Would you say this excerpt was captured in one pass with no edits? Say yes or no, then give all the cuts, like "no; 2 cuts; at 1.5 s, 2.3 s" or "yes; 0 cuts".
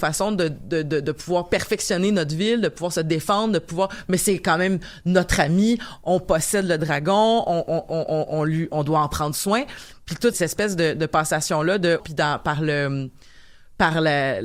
no; 2 cuts; at 10.3 s, 12.0 s